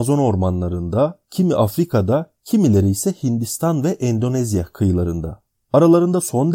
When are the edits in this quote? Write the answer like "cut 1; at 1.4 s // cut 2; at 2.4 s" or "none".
cut 1; at 1.3 s